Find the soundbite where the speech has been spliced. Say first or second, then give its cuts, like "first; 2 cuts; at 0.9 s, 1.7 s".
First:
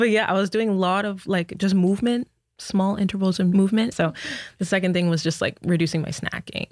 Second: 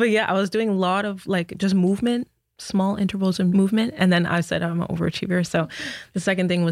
first; 1 cut; at 3.9 s